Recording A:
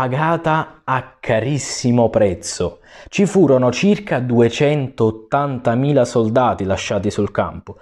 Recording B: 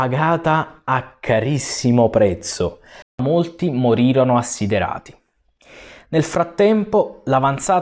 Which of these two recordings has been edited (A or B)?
B